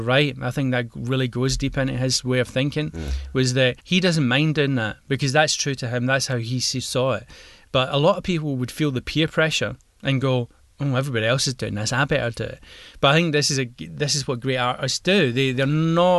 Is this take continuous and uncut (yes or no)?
no